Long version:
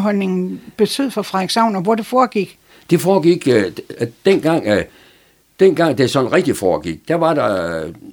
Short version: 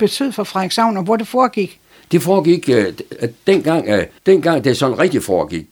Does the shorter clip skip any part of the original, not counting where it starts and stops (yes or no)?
yes